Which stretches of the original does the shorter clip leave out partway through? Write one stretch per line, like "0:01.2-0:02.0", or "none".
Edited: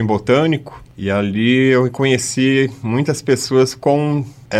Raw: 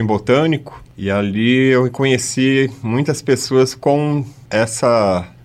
none